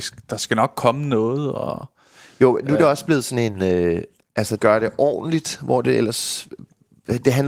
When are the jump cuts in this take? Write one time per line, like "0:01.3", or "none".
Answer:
0:04.6